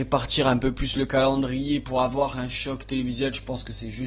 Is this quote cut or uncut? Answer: uncut